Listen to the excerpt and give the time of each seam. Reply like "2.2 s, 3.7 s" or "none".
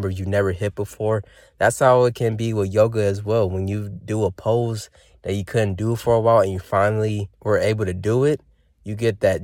7.3 s